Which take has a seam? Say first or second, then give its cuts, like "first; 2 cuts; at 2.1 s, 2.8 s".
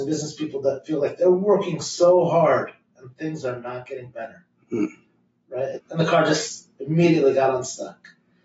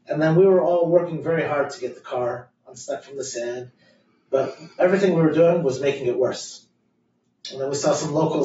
first; 1 cut; at 5.8 s